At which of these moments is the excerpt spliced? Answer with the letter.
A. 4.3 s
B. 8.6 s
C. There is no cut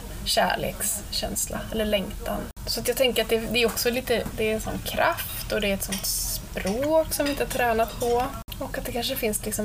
A